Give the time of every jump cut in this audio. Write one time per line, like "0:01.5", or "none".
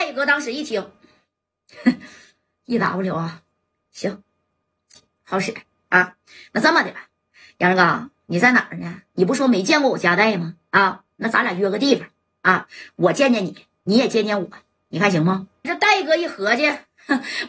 0:15.6